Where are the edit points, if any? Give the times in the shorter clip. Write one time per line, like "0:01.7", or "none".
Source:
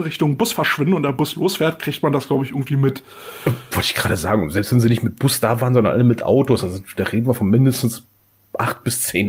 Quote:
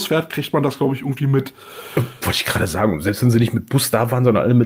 none